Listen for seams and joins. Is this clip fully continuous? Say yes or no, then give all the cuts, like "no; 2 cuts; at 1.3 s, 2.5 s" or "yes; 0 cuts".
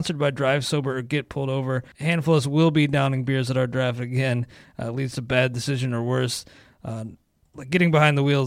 no; 1 cut; at 1.9 s